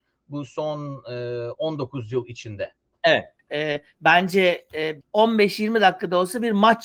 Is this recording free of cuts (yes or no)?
no